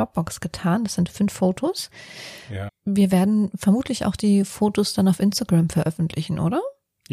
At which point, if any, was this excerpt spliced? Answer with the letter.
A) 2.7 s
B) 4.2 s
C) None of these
A